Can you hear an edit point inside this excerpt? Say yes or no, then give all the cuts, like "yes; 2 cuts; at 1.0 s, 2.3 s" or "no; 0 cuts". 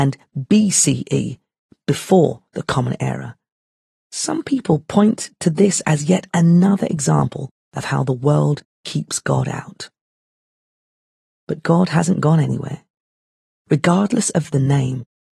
no; 0 cuts